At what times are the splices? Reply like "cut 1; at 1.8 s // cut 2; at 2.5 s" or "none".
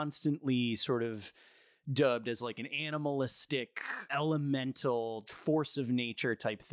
cut 1; at 4.1 s // cut 2; at 5.3 s